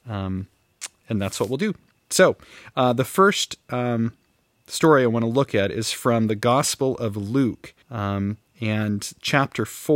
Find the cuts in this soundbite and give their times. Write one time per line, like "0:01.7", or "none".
0:07.8